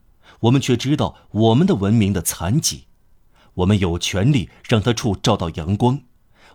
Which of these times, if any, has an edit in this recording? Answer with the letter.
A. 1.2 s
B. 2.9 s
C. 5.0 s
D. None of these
C